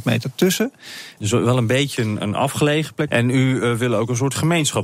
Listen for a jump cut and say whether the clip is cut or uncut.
cut